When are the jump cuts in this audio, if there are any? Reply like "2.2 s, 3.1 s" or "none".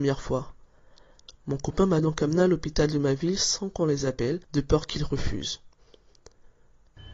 4.4 s